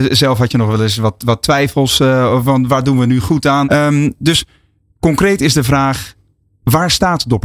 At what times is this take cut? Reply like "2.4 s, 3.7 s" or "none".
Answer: 3.6 s